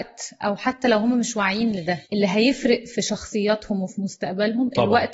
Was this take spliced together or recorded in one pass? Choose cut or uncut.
cut